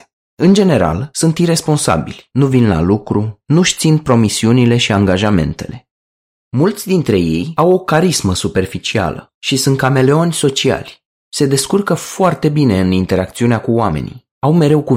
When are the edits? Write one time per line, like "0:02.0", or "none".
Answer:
0:02.3